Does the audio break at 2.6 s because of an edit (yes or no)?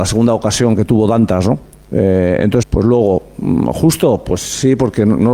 yes